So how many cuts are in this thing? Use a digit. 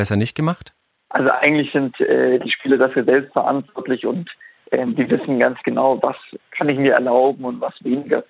1